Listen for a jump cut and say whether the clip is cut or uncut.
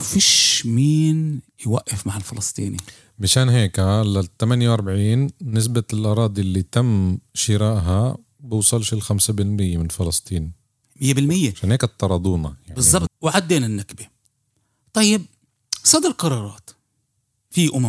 cut